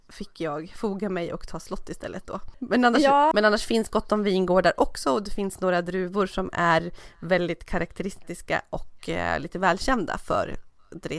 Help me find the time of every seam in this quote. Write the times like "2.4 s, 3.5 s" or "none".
3.3 s